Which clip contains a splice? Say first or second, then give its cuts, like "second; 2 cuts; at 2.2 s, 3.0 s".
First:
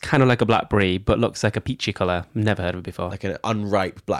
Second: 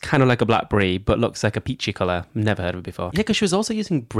second; 1 cut; at 3.1 s